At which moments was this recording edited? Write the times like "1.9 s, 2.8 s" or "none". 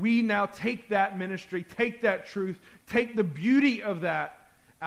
none